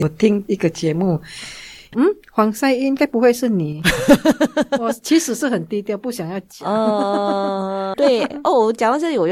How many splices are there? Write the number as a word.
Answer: one